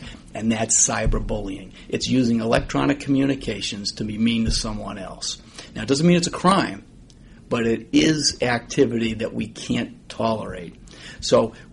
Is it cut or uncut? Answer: uncut